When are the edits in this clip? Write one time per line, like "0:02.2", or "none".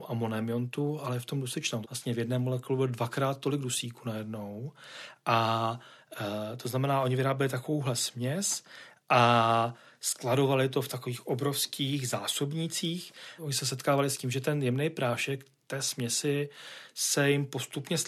0:01.8
0:13.4